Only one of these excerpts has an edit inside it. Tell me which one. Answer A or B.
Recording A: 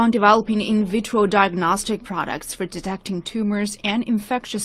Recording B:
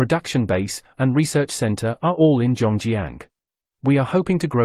B